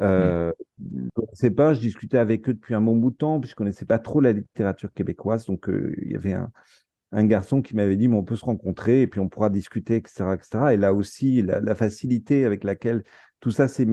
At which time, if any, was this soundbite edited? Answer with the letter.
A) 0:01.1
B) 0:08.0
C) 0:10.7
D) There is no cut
A